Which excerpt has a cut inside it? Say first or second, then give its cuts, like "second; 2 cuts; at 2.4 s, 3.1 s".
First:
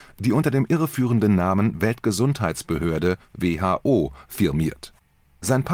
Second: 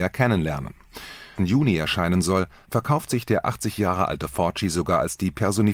second; 1 cut; at 1.4 s